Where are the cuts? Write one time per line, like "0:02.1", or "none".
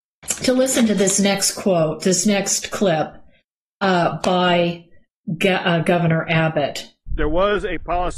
0:07.1